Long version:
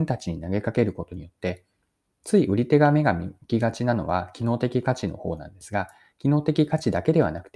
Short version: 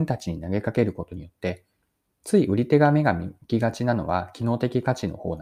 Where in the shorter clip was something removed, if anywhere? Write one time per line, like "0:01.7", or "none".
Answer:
none